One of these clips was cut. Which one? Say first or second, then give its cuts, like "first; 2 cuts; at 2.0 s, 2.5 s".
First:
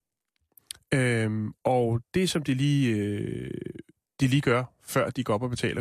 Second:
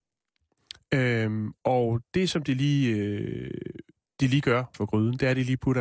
second; 1 cut; at 4.7 s